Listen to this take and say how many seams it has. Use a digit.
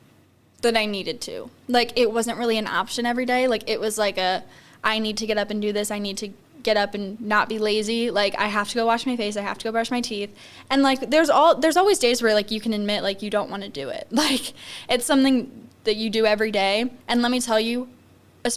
1